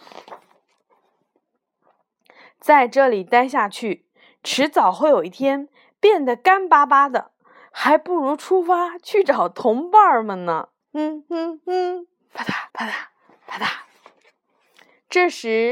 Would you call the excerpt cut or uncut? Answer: cut